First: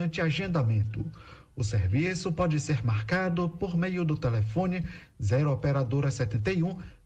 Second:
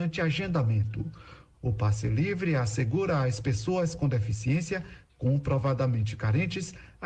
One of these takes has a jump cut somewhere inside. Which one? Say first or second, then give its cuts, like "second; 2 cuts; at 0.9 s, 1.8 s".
second; 1 cut; at 1.5 s